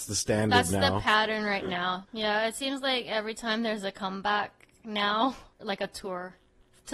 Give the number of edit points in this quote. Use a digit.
2